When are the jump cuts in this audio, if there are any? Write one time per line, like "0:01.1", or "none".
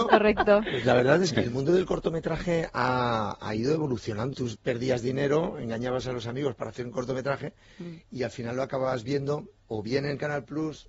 0:01.3
0:04.3